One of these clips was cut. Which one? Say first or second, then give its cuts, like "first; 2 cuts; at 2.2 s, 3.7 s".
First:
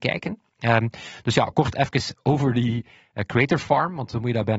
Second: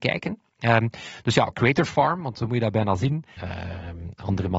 second; 2 cuts; at 1.5 s, 3.4 s